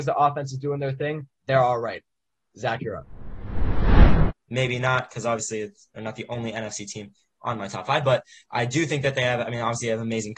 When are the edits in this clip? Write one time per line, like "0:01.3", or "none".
0:04.3